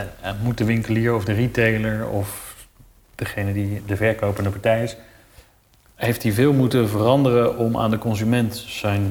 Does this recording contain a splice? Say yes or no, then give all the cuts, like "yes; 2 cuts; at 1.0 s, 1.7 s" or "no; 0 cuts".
no; 0 cuts